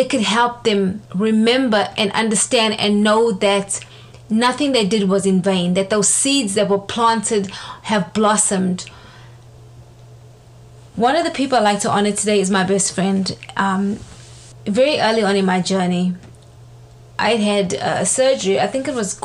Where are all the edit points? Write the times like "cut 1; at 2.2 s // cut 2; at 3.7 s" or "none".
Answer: none